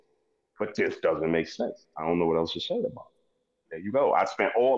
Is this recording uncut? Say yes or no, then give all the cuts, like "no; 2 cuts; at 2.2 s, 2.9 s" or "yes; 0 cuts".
no; 1 cut; at 3.7 s